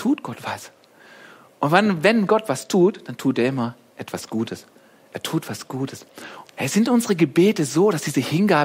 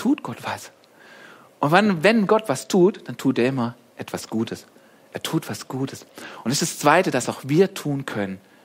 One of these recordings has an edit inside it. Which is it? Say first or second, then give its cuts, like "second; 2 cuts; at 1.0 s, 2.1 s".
first; 1 cut; at 6.4 s